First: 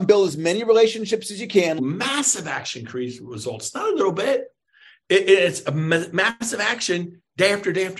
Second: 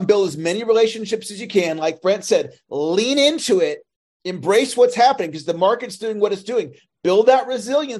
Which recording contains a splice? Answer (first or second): first